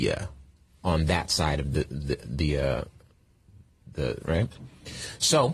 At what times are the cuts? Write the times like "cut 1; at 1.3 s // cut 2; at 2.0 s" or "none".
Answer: cut 1; at 4.2 s